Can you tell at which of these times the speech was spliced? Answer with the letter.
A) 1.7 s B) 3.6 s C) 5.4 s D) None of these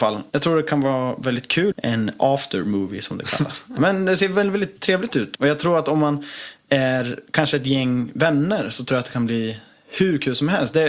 A